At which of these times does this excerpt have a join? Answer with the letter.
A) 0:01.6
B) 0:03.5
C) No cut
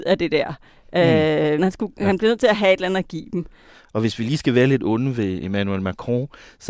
A